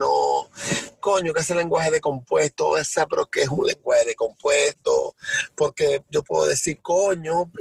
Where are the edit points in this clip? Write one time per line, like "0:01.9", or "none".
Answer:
none